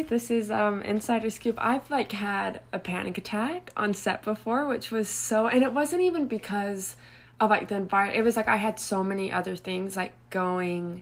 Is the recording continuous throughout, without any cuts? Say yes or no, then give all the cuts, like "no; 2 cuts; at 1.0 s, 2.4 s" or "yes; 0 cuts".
yes; 0 cuts